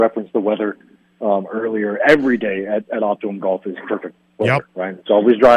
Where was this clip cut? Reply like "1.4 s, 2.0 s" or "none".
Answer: none